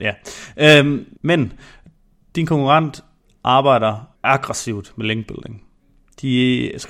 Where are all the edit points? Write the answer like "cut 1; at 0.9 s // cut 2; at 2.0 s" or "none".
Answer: cut 1; at 1.2 s // cut 2; at 4.2 s